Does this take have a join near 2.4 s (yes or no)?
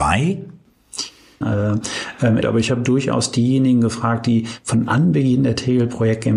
yes